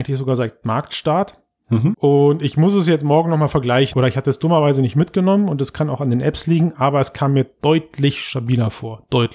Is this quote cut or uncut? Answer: cut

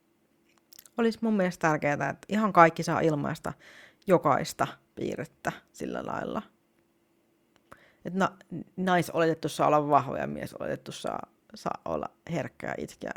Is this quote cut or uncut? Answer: uncut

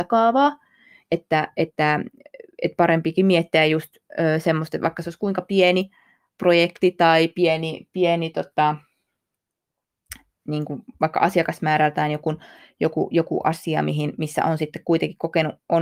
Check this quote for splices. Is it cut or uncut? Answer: uncut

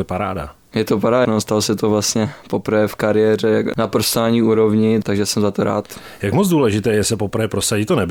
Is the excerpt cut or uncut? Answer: cut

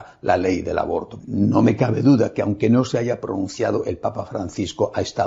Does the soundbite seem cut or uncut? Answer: cut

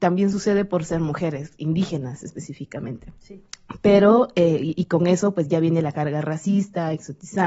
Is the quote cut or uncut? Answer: uncut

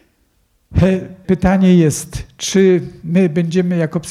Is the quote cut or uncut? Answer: cut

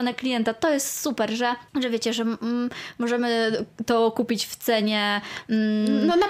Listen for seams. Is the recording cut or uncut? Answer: cut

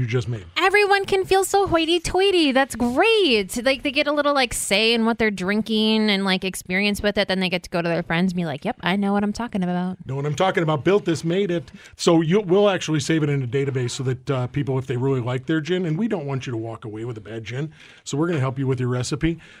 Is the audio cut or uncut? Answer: uncut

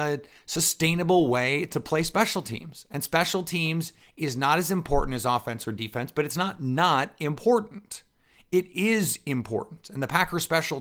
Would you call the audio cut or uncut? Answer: uncut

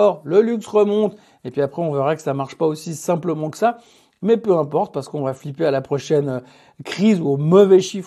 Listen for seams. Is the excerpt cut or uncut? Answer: uncut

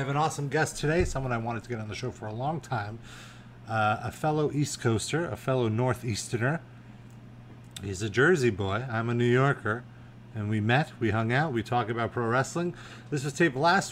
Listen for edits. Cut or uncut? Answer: uncut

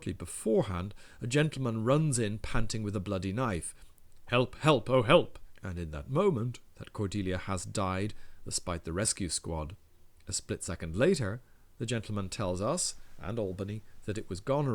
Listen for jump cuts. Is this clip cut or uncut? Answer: cut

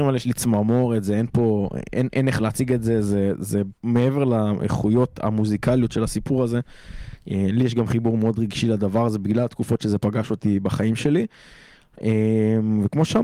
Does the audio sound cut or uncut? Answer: cut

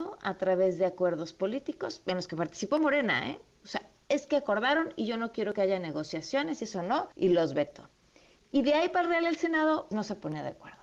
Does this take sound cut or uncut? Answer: cut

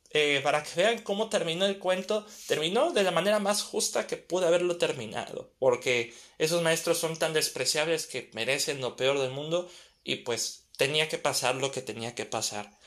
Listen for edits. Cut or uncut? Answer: cut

